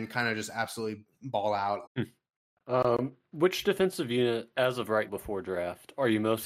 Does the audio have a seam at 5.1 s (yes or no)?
yes